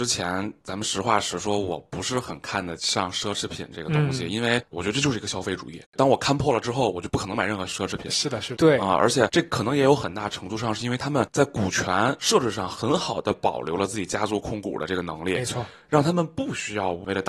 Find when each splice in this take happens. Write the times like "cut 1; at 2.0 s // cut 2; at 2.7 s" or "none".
cut 1; at 8.5 s